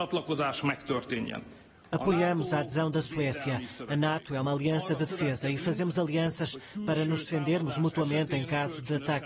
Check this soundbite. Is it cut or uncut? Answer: uncut